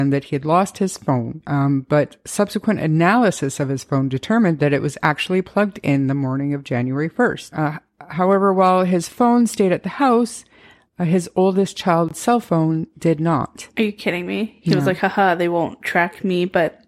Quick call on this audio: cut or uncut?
uncut